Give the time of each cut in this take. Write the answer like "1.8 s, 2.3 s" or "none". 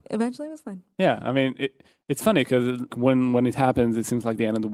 2.9 s